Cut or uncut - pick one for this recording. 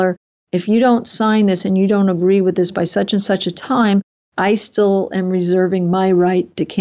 uncut